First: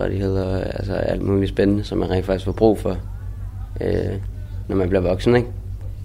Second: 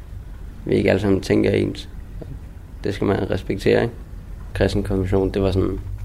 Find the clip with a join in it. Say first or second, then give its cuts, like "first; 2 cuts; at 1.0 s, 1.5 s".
second; 1 cut; at 4.5 s